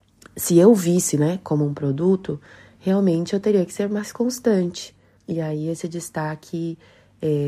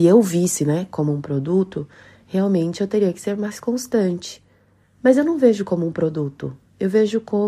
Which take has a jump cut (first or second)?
first